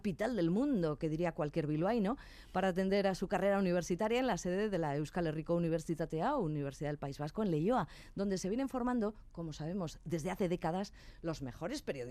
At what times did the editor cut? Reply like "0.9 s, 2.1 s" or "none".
none